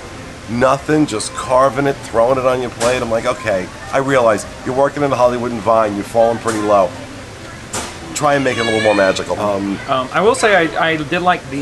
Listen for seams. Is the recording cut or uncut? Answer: cut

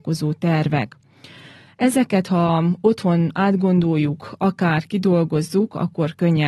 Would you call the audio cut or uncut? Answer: uncut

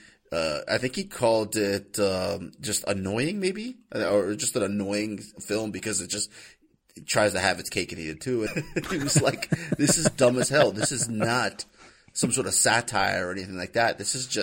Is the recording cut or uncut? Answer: cut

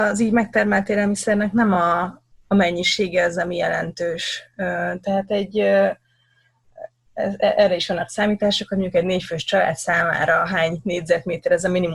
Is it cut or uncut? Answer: uncut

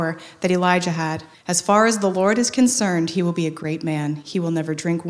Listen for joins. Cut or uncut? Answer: cut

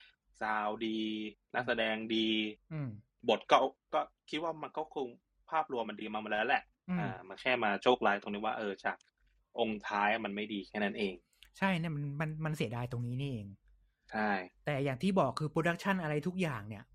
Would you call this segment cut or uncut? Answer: cut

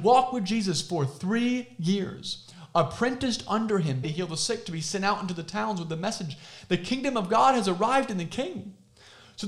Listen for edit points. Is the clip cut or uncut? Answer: cut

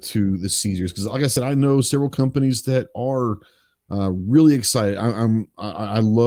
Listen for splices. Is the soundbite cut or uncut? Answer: uncut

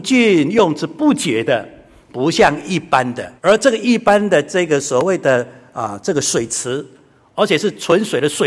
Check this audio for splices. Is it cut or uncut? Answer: cut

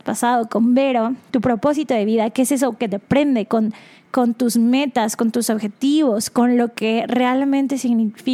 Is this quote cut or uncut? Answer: cut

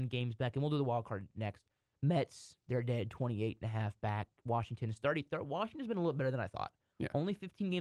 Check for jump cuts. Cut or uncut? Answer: uncut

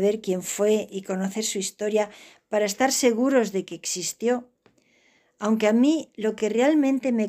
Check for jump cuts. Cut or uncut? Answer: uncut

